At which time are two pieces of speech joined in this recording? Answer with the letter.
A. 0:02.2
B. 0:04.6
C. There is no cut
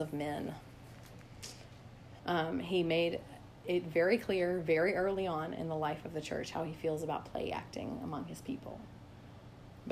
A